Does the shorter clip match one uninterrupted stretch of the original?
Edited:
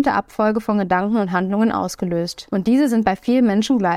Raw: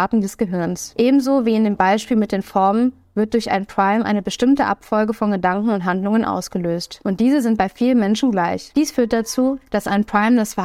yes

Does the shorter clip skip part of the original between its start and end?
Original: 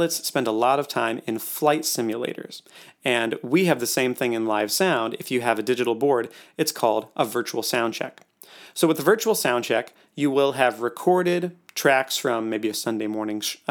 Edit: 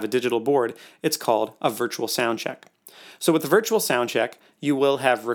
no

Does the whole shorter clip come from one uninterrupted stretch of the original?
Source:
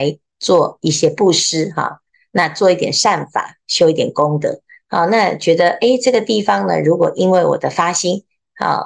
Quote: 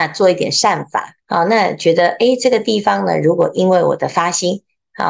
no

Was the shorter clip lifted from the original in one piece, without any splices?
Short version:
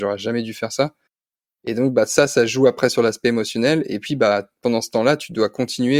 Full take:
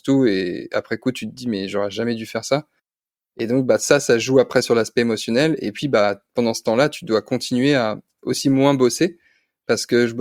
yes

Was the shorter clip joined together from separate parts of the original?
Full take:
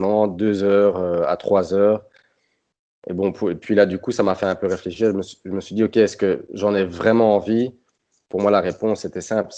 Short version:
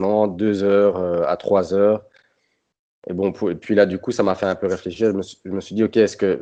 no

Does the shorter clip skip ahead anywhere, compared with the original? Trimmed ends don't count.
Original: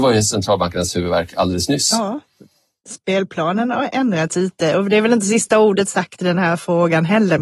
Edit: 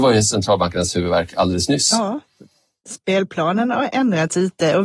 no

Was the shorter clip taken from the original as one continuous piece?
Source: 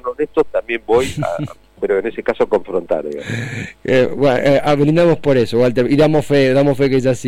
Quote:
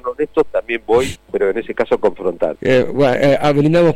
no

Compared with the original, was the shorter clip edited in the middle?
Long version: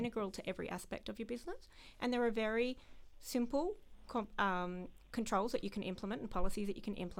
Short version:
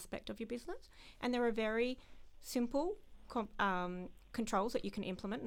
no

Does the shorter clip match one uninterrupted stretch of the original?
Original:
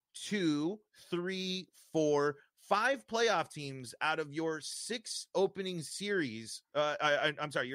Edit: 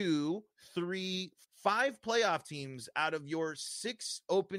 no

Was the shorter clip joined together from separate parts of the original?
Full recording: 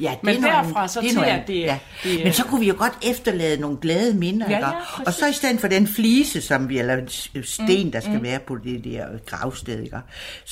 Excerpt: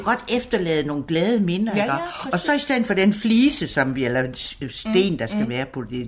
no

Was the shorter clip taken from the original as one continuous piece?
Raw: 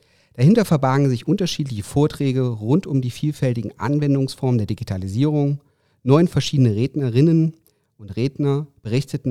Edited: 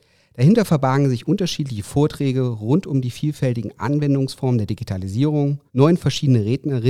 no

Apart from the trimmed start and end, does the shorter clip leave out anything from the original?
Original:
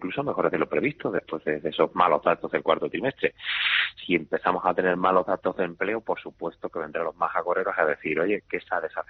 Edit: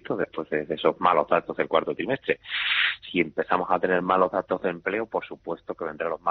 no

